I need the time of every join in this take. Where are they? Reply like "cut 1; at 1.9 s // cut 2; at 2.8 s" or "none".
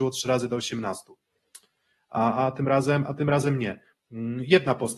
none